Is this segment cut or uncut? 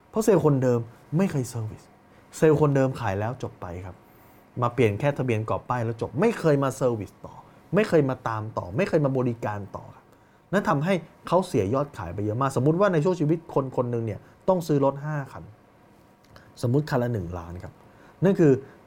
uncut